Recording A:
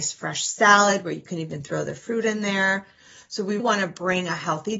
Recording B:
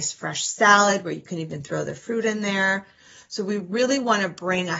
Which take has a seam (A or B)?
A